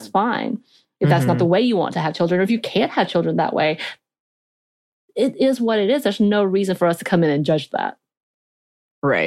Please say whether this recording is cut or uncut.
uncut